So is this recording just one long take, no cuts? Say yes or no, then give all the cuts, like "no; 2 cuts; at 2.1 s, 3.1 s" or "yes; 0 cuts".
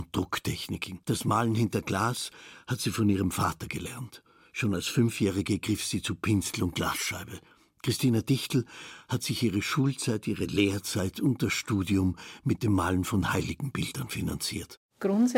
no; 1 cut; at 1.0 s